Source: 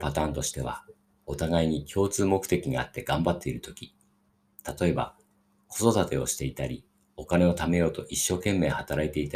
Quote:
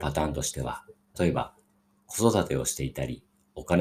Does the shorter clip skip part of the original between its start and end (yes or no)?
yes